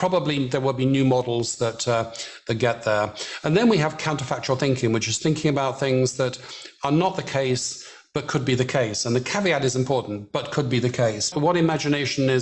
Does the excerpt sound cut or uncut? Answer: cut